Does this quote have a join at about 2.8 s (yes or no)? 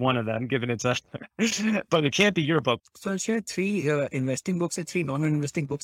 yes